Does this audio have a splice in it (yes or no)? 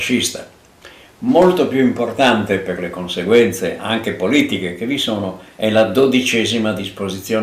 yes